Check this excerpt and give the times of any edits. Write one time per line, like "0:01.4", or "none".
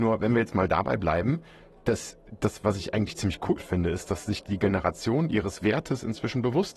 none